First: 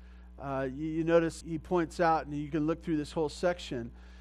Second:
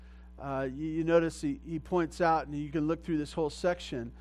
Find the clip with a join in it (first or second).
first